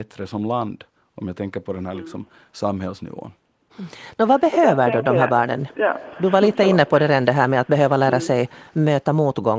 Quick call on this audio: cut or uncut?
uncut